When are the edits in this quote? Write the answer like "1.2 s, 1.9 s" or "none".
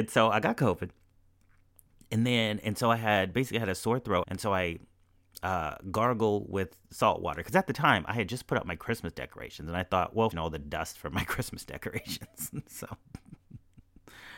4.2 s, 10.3 s